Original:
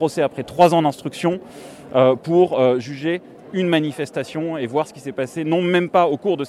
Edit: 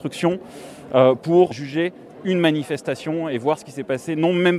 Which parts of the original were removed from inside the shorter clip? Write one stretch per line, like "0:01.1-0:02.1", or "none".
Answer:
0:02.5-0:02.8